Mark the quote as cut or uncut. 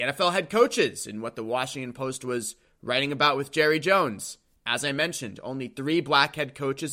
uncut